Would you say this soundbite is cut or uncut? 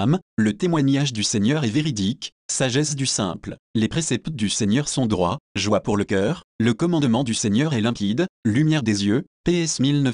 uncut